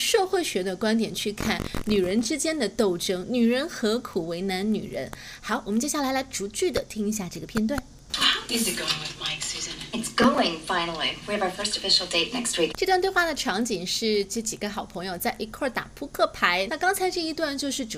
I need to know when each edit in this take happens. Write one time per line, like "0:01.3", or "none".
0:12.7
0:16.7